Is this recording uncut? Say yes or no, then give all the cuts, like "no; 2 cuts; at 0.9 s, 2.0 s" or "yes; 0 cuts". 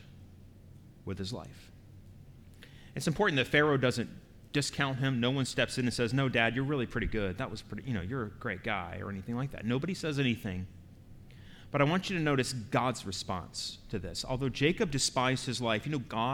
yes; 0 cuts